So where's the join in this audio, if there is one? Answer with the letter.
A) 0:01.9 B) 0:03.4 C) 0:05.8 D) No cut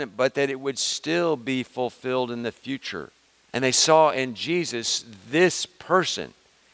B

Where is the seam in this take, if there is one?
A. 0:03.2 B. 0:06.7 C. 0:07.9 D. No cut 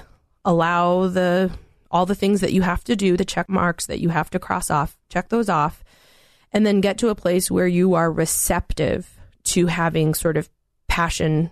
D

